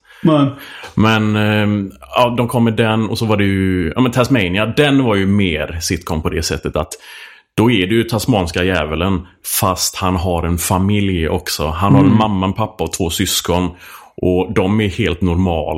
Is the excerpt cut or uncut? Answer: uncut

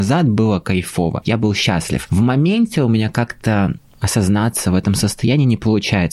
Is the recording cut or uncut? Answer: uncut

